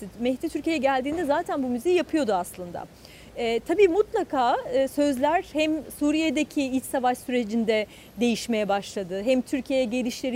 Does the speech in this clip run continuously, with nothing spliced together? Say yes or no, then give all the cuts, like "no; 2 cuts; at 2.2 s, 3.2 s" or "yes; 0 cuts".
yes; 0 cuts